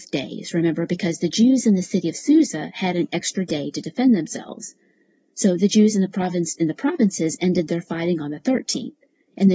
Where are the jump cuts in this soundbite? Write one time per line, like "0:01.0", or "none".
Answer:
none